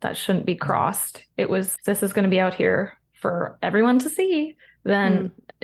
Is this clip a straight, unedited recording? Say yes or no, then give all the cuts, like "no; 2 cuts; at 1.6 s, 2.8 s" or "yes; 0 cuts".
no; 1 cut; at 1.8 s